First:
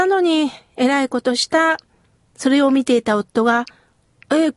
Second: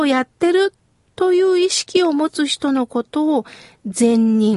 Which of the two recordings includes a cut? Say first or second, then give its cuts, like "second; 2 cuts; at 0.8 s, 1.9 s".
first; 1 cut; at 2.3 s